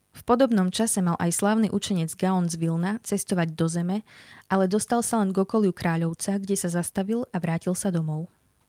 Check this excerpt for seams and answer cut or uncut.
uncut